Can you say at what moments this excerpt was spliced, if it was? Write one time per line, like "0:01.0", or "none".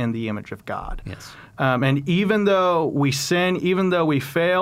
none